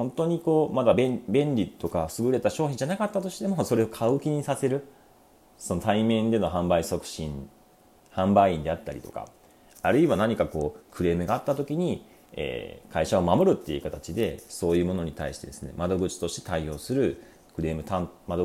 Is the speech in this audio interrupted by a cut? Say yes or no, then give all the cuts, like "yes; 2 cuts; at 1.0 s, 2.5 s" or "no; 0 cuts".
no; 0 cuts